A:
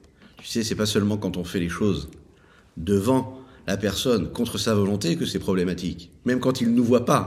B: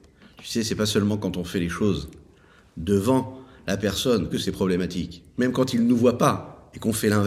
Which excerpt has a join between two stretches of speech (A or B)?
B